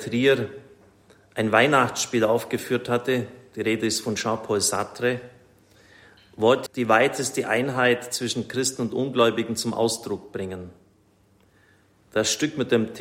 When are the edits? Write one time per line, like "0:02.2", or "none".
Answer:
0:06.7

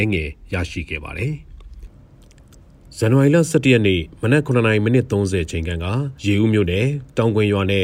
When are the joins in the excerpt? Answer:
0:06.2

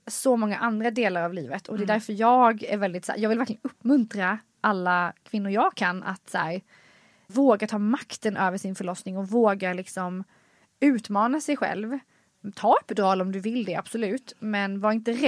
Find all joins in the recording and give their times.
0:07.3

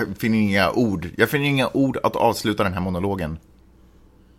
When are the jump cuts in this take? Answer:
none

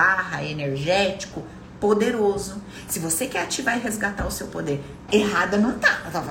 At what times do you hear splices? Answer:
0:05.1

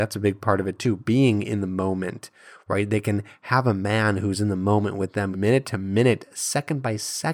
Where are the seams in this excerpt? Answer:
0:05.3

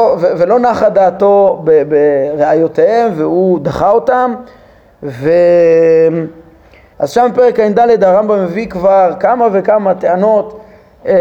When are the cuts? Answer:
0:06.9

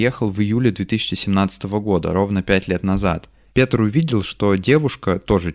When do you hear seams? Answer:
0:03.5

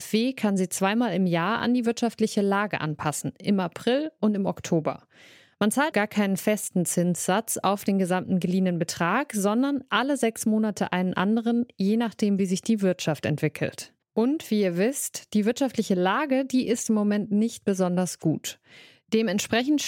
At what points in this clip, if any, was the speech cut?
0:05.9
0:14.0

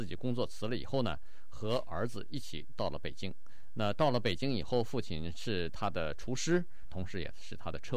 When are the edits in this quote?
0:06.8

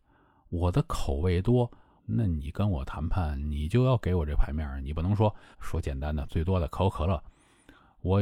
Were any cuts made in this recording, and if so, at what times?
0:02.0
0:05.5

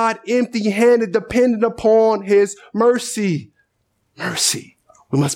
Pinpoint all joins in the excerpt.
0:04.0

